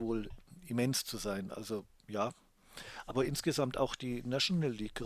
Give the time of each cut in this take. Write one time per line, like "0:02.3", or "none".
none